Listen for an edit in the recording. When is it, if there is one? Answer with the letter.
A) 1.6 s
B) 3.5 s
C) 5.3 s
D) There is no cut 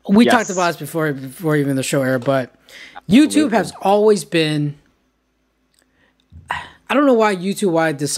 D